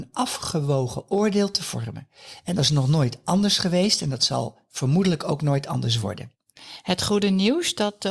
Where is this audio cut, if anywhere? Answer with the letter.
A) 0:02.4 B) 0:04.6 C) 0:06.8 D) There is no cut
D